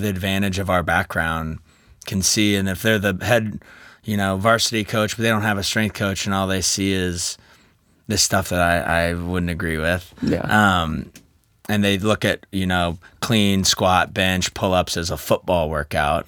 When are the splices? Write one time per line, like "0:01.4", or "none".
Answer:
none